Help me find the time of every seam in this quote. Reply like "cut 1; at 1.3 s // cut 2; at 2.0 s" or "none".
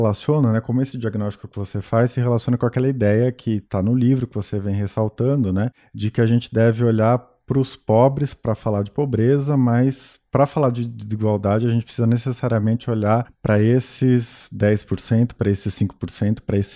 none